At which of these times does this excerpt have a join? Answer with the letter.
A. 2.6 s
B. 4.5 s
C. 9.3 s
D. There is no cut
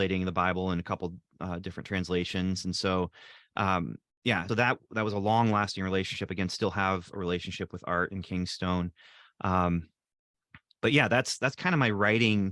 B